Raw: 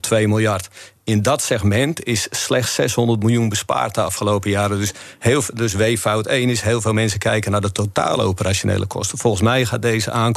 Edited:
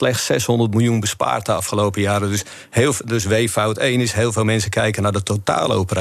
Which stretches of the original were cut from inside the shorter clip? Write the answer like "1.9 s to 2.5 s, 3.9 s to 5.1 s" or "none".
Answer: none